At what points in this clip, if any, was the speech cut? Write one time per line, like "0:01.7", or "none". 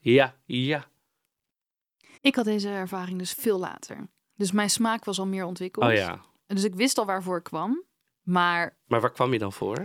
0:02.2